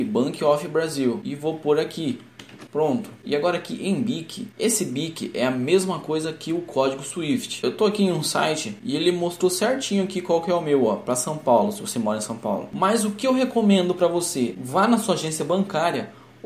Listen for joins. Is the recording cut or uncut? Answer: cut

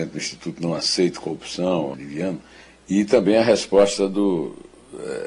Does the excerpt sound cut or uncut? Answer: cut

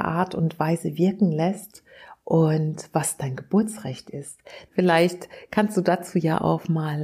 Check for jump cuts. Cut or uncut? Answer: cut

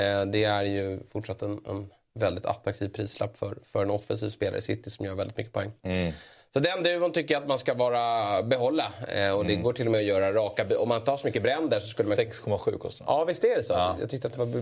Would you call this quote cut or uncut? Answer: uncut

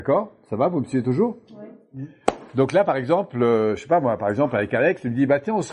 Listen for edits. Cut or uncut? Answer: uncut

